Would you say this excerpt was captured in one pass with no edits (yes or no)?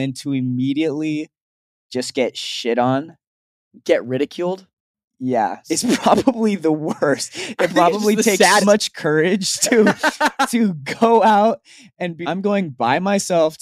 no